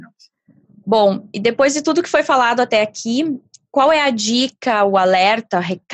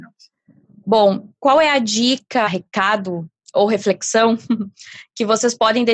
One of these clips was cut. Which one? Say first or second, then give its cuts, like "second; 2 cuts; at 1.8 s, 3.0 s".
second; 2 cuts; at 1.3 s, 2.5 s